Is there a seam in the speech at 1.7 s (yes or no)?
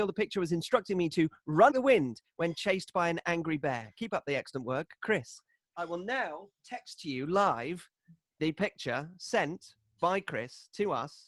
yes